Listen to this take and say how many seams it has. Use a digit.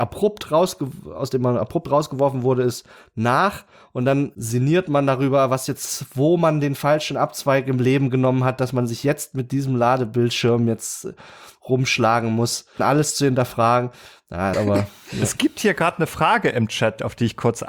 2